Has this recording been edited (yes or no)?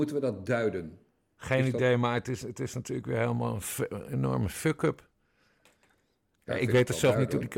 no